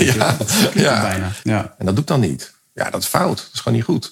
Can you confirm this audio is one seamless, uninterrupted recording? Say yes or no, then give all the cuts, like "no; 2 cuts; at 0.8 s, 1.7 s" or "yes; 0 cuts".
no; 1 cut; at 1.4 s